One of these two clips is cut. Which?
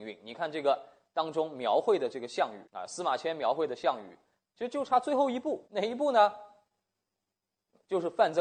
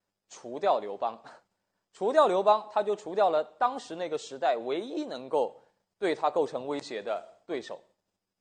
first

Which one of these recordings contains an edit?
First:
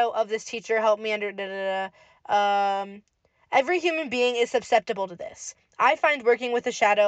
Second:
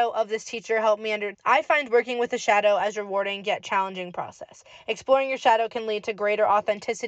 second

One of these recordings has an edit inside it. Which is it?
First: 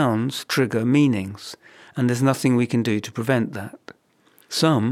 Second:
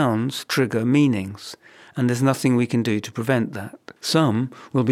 second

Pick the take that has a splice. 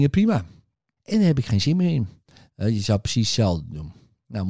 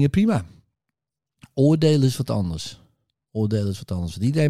first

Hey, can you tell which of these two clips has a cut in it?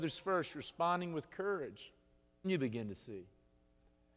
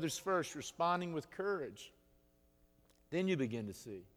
first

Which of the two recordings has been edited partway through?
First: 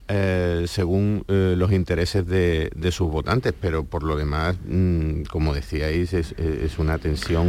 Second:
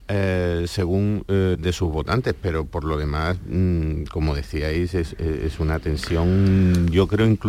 second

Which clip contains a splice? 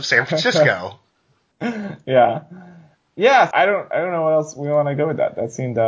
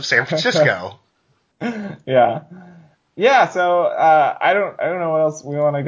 first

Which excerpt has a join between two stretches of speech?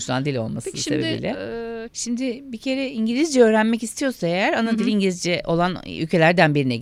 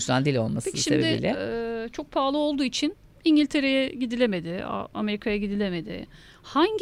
first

